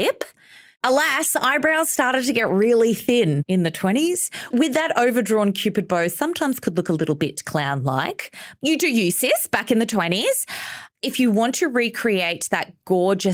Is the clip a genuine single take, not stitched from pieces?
no; 1 cut; at 4.5 s

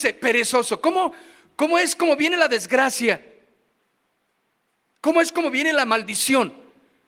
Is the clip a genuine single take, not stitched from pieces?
yes; 0 cuts

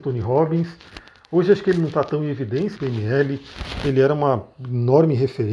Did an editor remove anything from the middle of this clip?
yes; 1 cut; at 2.8 s

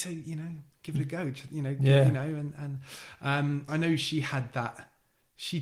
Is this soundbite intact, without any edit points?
no; 1 cut; at 3.7 s

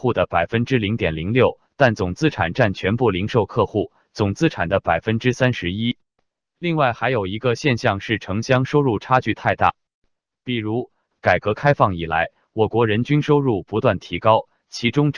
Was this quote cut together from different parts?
yes; 1 cut; at 11.1 s

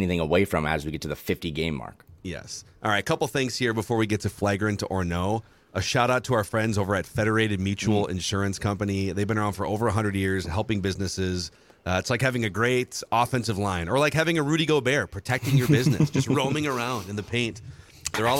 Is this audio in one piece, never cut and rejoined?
yes; 0 cuts

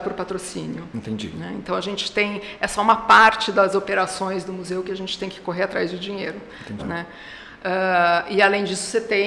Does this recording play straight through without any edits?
no; 1 cut; at 6.8 s

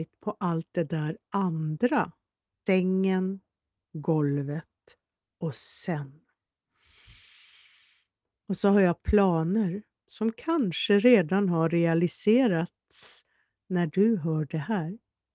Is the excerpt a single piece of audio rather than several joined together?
no; 2 cuts; at 2.7 s, 8.4 s

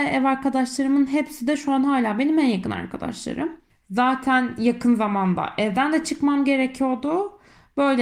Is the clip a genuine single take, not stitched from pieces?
no; 1 cut; at 3.7 s

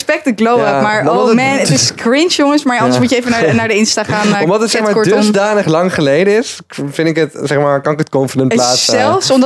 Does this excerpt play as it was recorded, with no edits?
yes; 0 cuts

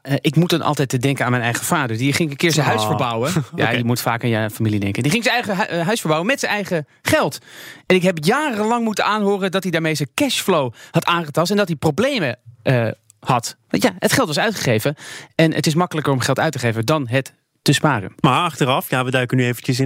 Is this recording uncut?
yes; 0 cuts

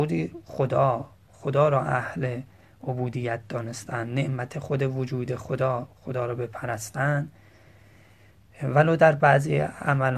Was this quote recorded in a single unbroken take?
yes; 0 cuts

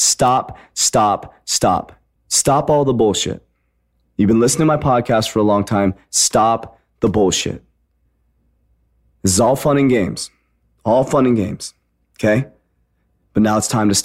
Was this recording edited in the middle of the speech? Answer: yes; 1 cut; at 2.2 s

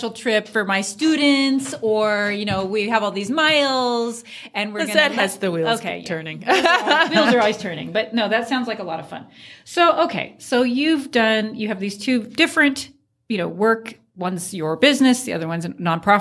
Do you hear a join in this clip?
no; 0 cuts

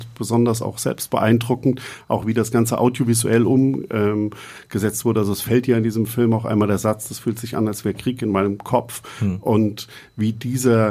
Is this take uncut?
yes; 0 cuts

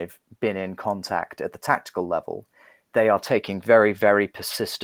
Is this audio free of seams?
yes; 0 cuts

